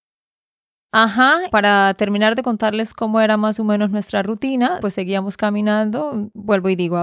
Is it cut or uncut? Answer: cut